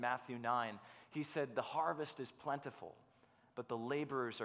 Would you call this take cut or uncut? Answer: uncut